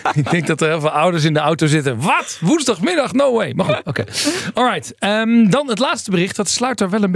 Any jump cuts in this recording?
no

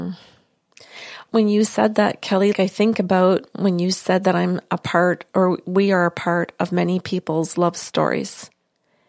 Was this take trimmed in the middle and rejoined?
yes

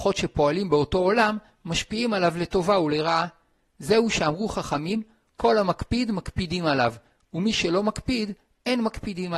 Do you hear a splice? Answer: no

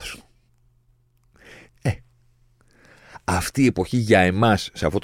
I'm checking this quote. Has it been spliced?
yes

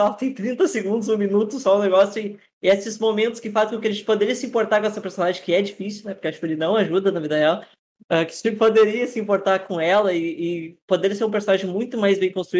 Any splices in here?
no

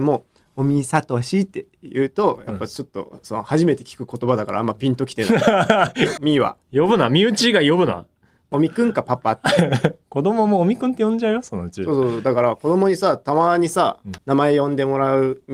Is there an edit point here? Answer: yes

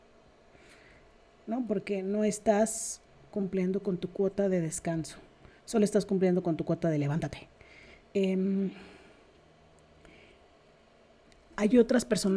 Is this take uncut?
yes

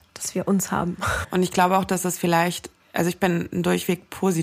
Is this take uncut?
no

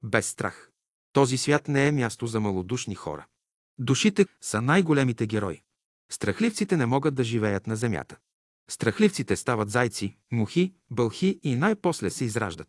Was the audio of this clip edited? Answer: yes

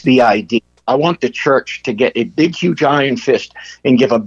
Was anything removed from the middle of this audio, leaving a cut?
no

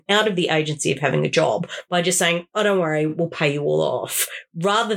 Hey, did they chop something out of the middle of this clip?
no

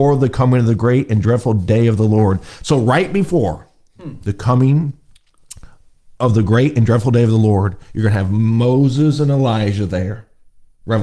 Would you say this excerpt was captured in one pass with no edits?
yes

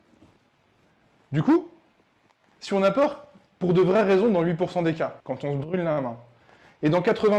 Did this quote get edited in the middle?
yes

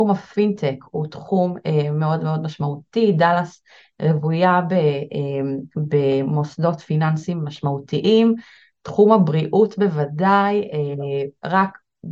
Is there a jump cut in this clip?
no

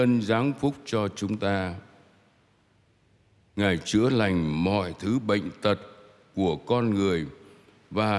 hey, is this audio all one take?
yes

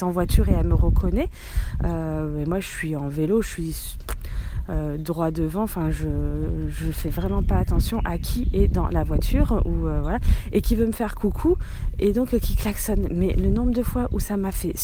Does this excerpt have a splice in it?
no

